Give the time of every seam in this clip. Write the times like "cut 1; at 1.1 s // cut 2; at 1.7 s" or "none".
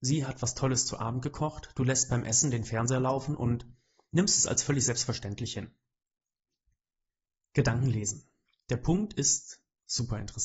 none

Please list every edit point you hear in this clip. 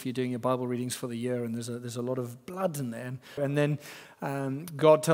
cut 1; at 3.4 s

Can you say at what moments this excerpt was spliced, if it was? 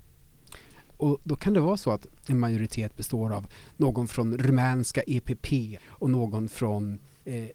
cut 1; at 0.9 s // cut 2; at 5.8 s

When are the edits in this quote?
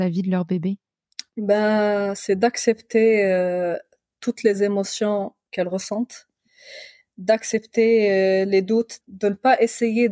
cut 1; at 9.0 s

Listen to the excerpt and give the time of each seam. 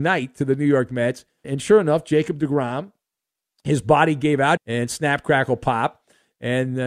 cut 1; at 1.4 s // cut 2; at 4.6 s

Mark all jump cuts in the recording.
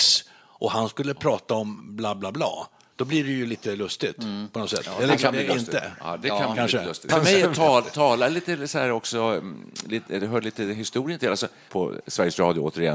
cut 1; at 11.7 s

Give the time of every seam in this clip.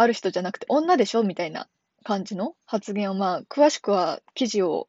cut 1; at 2.6 s

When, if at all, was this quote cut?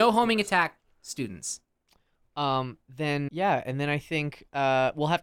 cut 1; at 3.3 s

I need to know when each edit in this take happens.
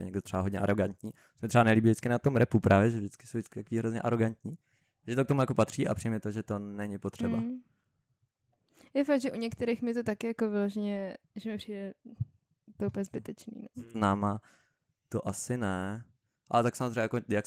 cut 1; at 13.9 s

